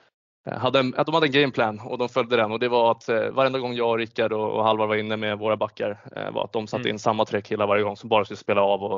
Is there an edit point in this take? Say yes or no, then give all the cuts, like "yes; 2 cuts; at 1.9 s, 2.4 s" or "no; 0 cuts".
yes; 1 cut; at 3.3 s